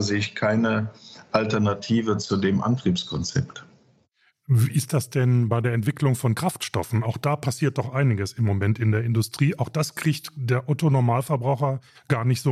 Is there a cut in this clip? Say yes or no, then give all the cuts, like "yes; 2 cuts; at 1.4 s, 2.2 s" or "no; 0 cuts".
no; 0 cuts